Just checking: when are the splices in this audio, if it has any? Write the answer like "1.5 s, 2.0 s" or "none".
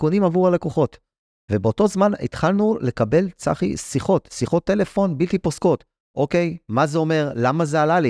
none